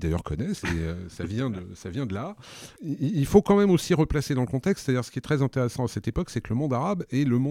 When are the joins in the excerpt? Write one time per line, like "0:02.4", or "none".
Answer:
0:02.7